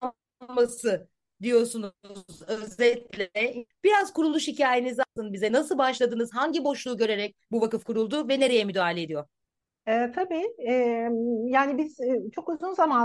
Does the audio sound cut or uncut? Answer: uncut